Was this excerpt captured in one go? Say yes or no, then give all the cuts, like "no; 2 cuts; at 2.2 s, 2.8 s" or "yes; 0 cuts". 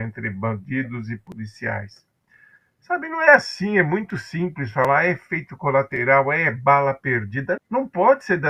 no; 1 cut; at 7.6 s